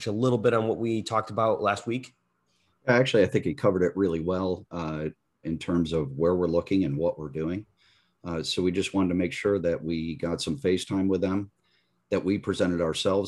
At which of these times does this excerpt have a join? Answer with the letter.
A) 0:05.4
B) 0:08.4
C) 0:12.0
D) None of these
A